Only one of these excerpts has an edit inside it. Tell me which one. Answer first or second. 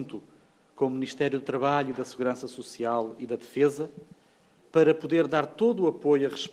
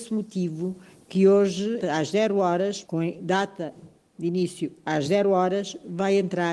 second